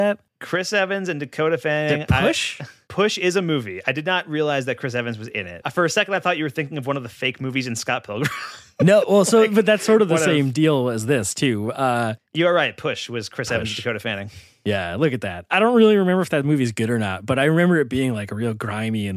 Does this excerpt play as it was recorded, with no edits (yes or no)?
no